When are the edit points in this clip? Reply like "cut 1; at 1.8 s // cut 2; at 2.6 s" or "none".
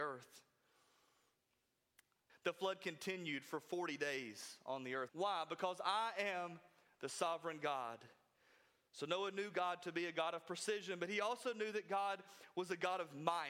cut 1; at 2.3 s // cut 2; at 5.1 s